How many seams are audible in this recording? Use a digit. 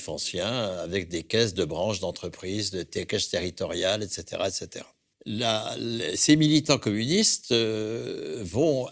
0